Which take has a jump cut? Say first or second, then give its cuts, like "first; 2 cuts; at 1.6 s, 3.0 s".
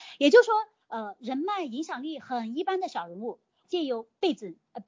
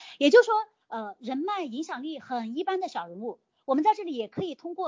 first; 1 cut; at 3.6 s